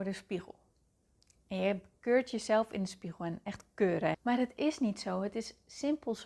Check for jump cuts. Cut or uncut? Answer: cut